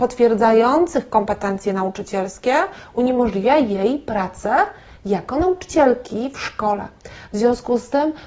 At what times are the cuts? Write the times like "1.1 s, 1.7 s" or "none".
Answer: none